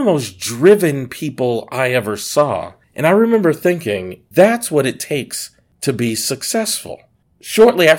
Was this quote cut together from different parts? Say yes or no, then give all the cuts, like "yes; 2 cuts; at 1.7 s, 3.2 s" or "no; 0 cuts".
yes; 2 cuts; at 2.8 s, 4.3 s